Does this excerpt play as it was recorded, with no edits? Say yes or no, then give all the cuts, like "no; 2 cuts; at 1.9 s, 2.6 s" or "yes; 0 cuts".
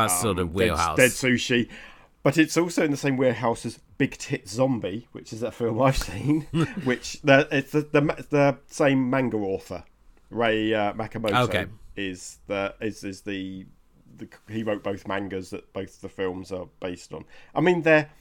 yes; 0 cuts